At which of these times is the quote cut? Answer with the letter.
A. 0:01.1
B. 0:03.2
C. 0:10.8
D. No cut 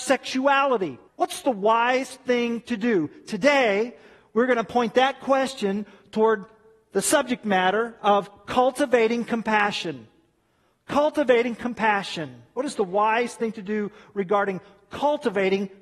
A